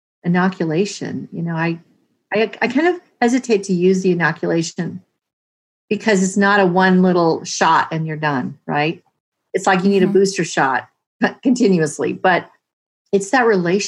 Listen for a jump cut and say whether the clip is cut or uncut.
uncut